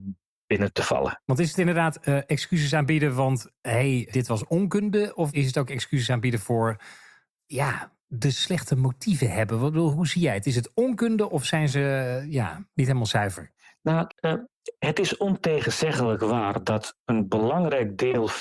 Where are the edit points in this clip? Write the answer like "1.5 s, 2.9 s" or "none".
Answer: 1.2 s, 4.1 s, 14.1 s